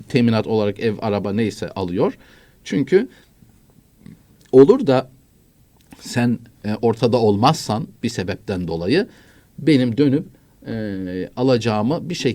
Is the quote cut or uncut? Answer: uncut